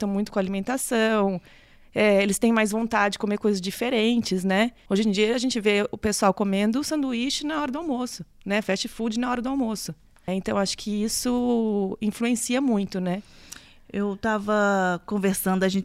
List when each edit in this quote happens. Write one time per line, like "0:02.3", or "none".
0:04.9
0:10.3